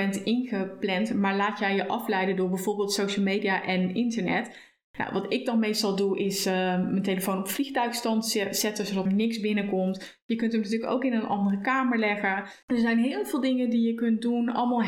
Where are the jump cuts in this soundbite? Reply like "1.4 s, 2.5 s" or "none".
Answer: 9.1 s, 12.6 s